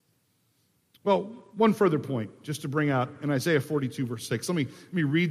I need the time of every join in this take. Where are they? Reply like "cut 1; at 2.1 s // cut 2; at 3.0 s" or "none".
none